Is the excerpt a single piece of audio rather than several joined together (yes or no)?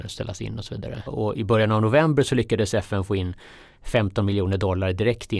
no